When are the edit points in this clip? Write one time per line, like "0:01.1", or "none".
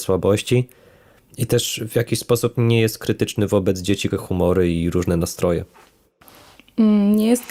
0:04.1